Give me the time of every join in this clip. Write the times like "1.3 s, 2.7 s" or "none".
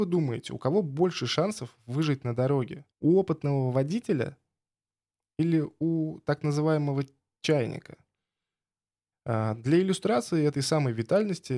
2.9 s, 9.1 s